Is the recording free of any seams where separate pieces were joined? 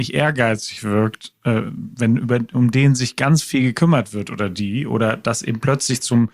yes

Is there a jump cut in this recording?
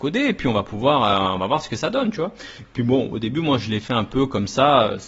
no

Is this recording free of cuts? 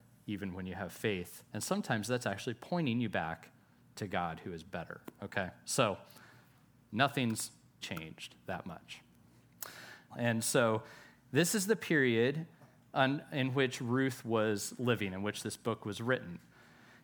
no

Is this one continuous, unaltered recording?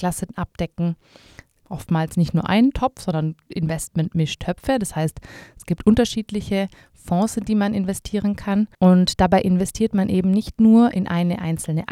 no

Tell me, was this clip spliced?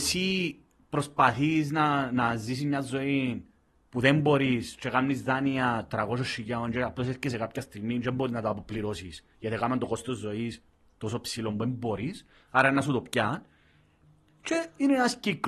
no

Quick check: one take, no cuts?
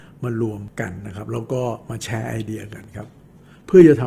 yes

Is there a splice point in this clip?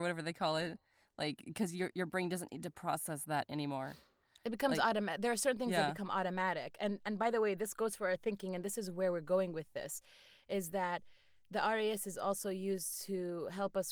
no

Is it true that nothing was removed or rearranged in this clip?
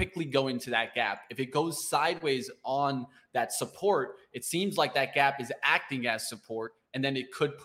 yes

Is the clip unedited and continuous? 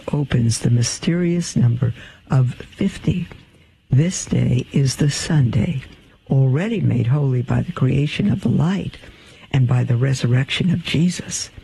yes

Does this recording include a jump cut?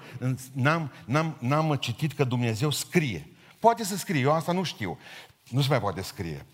yes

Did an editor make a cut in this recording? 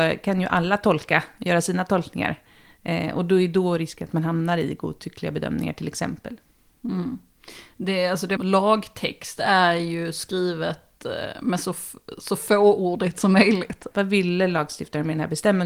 yes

